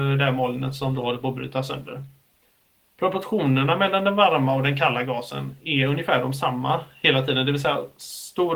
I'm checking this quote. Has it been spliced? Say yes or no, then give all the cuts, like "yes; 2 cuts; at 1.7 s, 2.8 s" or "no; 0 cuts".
no; 0 cuts